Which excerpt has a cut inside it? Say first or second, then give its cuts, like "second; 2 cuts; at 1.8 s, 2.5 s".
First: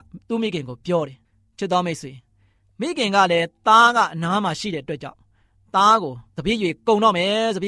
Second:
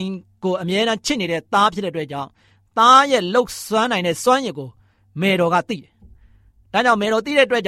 first; 1 cut; at 6.3 s